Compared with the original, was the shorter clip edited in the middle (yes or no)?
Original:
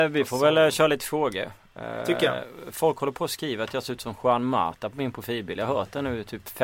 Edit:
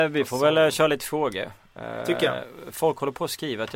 no